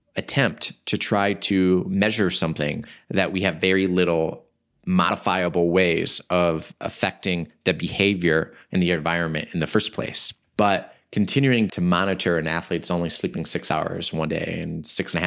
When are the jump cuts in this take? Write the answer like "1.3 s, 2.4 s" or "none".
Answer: 10.4 s, 11.7 s